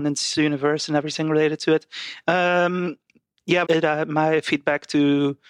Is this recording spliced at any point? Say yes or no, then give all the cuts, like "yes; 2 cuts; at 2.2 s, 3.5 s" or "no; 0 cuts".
yes; 2 cuts; at 2.2 s, 3.6 s